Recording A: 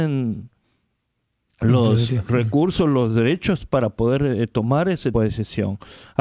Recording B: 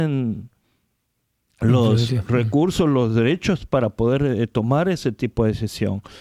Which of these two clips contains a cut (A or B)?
A